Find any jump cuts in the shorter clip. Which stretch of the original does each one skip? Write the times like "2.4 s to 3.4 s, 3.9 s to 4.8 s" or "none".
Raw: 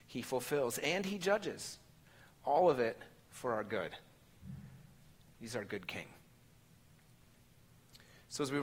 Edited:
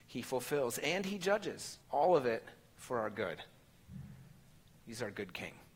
1.8 s to 2.4 s